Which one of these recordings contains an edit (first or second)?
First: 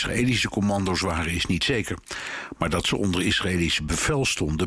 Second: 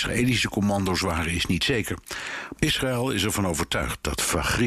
second